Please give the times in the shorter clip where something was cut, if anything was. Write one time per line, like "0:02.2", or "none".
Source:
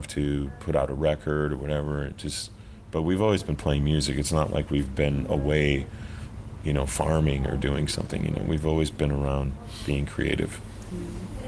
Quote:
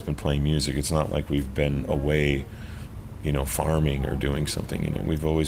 none